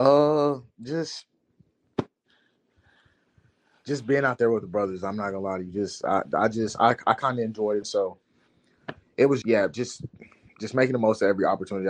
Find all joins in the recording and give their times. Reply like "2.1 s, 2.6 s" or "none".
7.8 s, 9.4 s